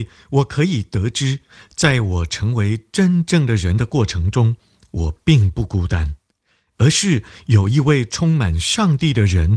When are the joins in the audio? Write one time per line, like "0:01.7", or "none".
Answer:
none